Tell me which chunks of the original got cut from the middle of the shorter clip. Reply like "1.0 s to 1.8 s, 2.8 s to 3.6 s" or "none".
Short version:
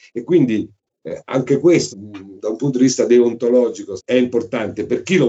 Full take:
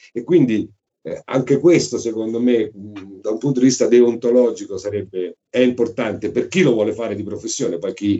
1.9 s to 2.7 s, 4.8 s to 5.4 s